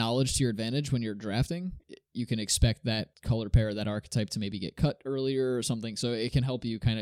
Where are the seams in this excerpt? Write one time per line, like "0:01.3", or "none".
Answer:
none